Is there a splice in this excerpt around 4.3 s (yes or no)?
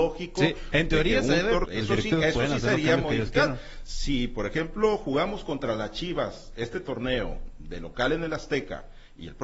no